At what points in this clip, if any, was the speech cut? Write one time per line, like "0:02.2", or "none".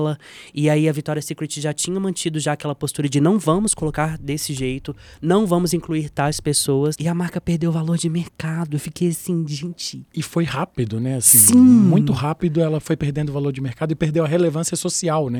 0:06.9